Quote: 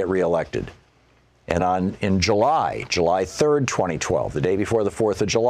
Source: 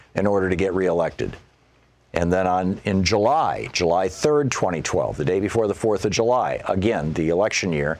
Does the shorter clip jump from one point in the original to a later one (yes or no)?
yes